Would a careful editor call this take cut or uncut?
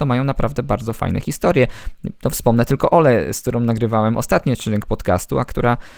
uncut